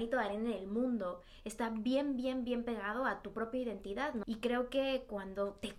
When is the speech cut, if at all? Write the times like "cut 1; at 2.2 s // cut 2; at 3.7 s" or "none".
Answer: cut 1; at 4.2 s